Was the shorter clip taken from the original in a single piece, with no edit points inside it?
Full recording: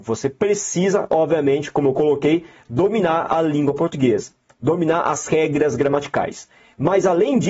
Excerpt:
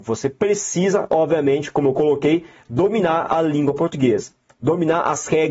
yes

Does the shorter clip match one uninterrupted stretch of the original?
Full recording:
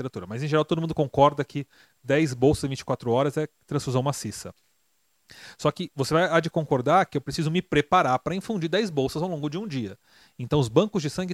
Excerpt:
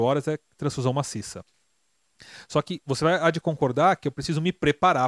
yes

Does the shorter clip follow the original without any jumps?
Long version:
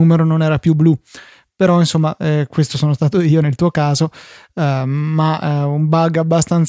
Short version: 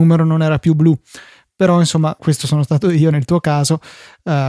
no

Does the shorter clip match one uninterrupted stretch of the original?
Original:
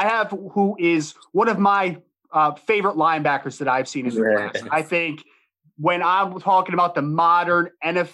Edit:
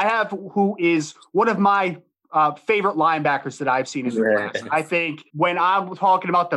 no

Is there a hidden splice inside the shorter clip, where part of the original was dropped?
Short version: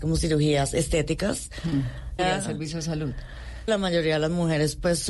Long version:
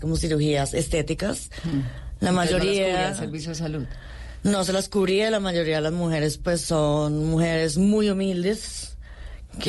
yes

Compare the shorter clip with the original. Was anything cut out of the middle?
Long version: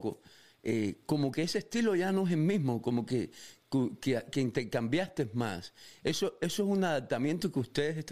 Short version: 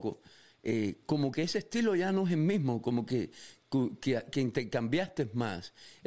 no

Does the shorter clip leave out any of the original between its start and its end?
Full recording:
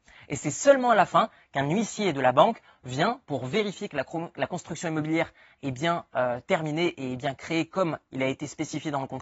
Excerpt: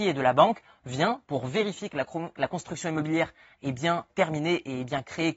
yes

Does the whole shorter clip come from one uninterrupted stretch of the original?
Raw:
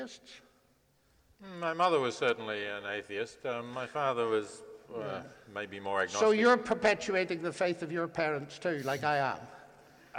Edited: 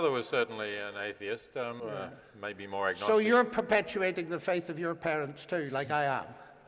no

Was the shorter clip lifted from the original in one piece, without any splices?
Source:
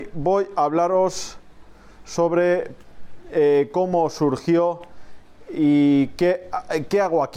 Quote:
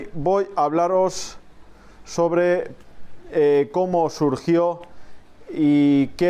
yes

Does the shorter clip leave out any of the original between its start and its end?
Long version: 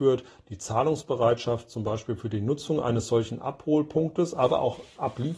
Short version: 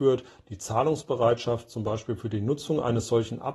no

